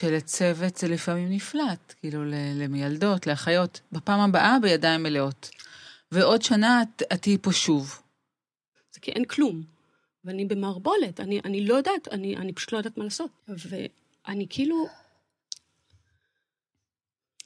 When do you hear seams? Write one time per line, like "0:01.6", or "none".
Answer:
0:08.8
0:13.4